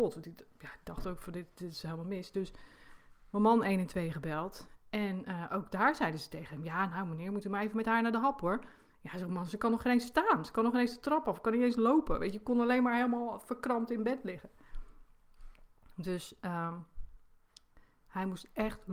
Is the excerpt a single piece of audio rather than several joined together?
yes; 0 cuts

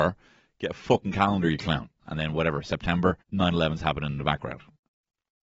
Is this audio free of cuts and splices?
no; 2 cuts; at 2.0 s, 3.2 s

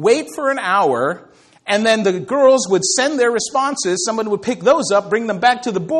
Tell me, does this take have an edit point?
no; 0 cuts

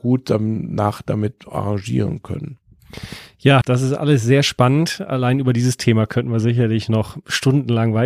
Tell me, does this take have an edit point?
yes; 1 cut; at 3.6 s

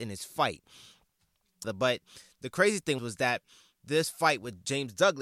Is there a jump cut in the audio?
yes; 2 cuts; at 1.6 s, 3.0 s

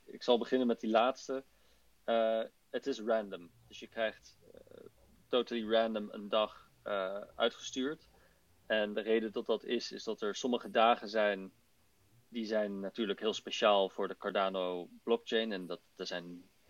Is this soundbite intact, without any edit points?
yes; 0 cuts

